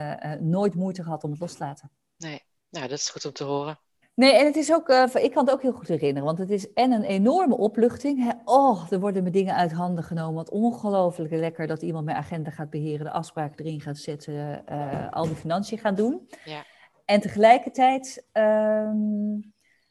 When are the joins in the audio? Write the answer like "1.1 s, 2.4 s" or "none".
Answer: 4.0 s